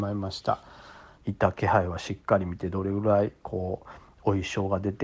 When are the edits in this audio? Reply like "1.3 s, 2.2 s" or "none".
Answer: 1.1 s